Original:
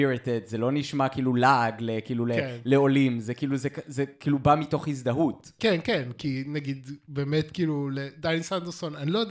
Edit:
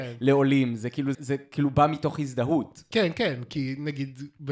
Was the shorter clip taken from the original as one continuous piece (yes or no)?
no